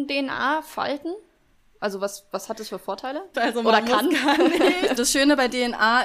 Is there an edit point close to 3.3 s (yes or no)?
yes